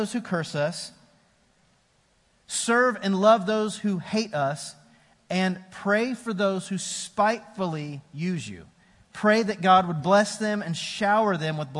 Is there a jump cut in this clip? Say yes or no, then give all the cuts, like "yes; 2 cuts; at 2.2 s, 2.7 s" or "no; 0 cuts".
no; 0 cuts